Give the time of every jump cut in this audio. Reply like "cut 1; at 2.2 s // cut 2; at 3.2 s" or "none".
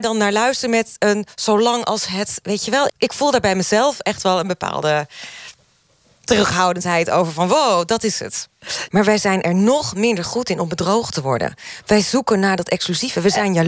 cut 1; at 2.9 s // cut 2; at 8.9 s